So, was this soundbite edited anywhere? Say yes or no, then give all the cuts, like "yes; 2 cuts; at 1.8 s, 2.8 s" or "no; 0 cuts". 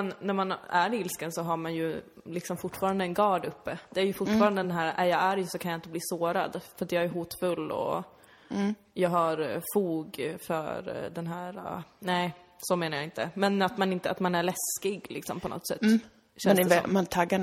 no; 0 cuts